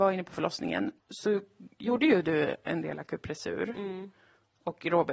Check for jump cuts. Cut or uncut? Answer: cut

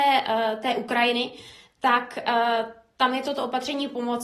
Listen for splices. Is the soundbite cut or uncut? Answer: uncut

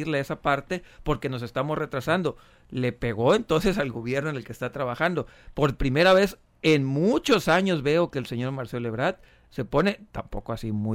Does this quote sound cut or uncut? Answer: uncut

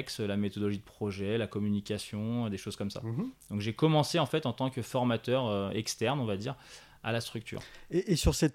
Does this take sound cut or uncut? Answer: uncut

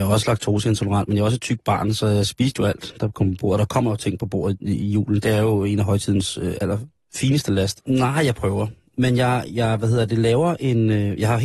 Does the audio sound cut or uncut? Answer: cut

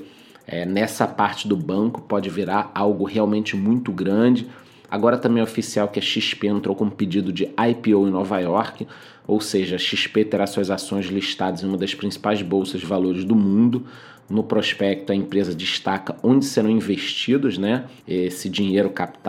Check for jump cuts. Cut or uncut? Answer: cut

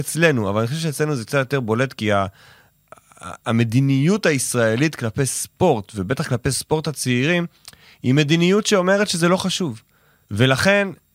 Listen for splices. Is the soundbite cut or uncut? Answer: cut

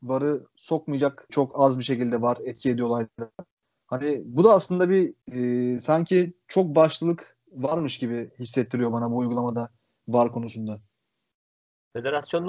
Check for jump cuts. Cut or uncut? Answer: cut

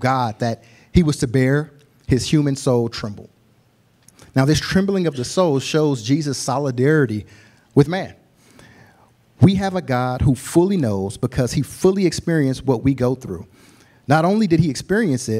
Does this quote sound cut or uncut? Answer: uncut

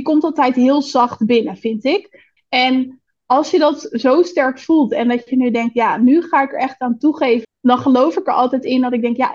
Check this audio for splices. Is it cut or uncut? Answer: cut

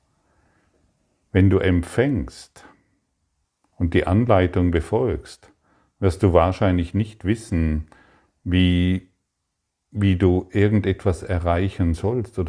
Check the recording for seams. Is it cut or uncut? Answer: uncut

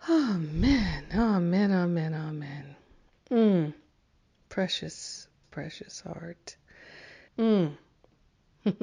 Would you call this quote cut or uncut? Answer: cut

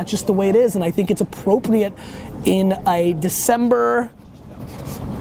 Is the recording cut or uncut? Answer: uncut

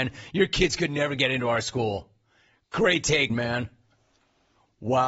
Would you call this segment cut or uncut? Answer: cut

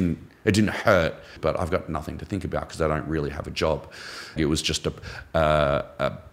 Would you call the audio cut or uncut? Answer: cut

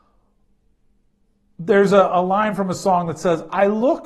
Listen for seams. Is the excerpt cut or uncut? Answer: uncut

